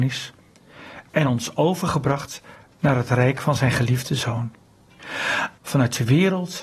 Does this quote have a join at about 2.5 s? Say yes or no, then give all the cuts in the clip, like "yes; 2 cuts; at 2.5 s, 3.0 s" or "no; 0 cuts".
no; 1 cut; at 5.6 s